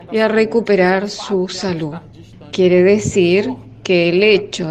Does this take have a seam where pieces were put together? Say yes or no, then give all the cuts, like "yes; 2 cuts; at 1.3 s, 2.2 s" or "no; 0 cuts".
no; 0 cuts